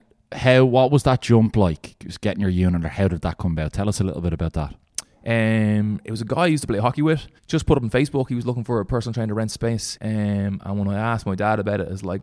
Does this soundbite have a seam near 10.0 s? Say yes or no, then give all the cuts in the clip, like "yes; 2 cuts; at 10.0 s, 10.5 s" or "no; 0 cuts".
yes; 2 cuts; at 7.4 s, 10.0 s